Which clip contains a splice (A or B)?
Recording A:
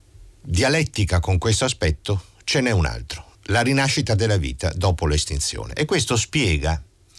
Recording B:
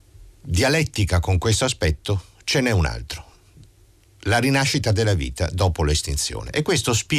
A